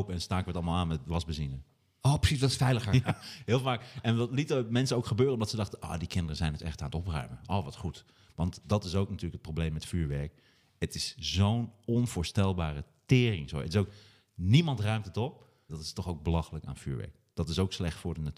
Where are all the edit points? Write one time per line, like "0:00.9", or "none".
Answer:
0:03.0
0:15.7